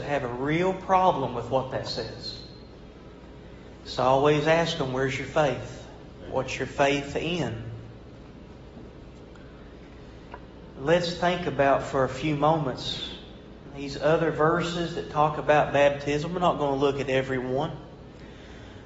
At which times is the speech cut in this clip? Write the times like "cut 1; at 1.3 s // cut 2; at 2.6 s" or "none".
cut 1; at 10.7 s